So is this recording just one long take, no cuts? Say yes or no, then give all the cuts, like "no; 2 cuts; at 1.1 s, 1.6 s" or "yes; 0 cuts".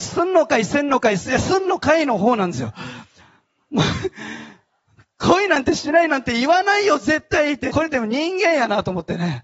no; 2 cuts; at 1.2 s, 7.7 s